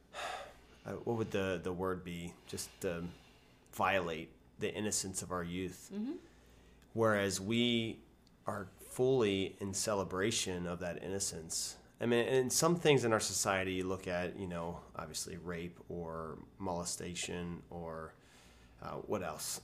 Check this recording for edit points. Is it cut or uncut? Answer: uncut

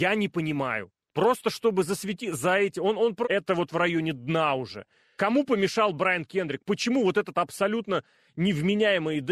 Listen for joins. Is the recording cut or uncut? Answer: cut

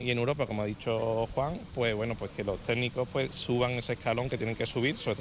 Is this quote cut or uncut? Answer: uncut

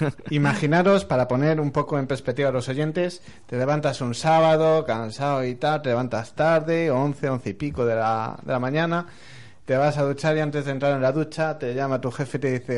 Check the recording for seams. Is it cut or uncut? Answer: uncut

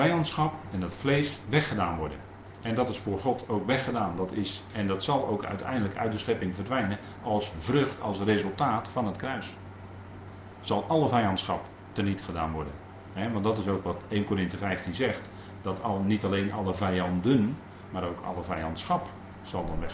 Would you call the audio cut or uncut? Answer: uncut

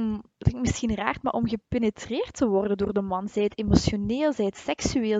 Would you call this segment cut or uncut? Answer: uncut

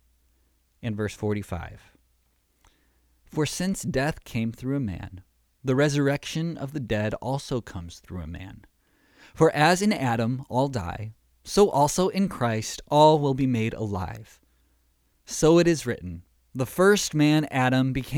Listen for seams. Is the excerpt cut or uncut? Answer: uncut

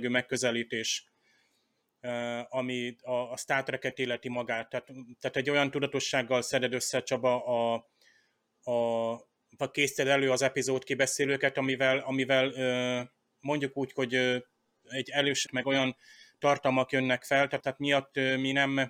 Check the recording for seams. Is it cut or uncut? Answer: cut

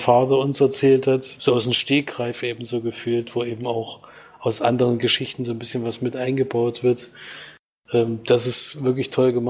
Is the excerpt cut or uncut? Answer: cut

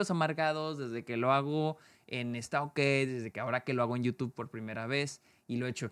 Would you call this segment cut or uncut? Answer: uncut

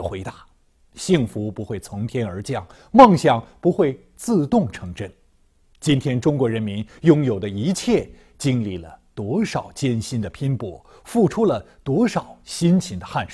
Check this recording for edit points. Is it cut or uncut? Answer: uncut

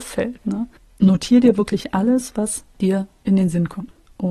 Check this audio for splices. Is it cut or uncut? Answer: uncut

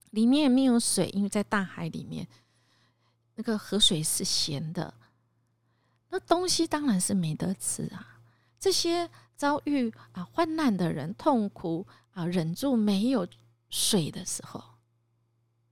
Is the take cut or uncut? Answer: uncut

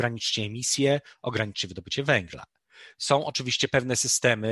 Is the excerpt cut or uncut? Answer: uncut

